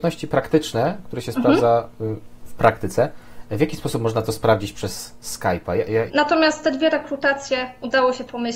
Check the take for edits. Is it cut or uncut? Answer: cut